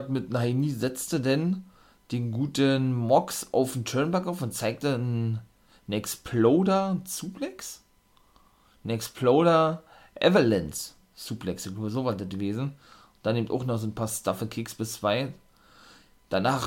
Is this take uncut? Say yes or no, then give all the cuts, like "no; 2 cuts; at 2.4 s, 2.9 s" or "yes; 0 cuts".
yes; 0 cuts